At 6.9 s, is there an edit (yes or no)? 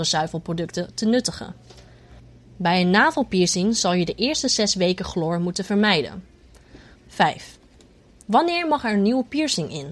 yes